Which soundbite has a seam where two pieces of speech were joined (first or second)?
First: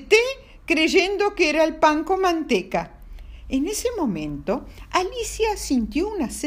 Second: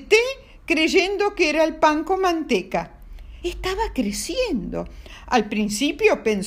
second